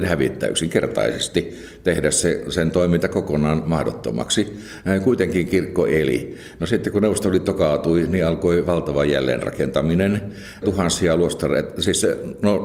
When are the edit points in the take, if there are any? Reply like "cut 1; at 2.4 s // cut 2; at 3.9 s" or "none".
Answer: cut 1; at 10.6 s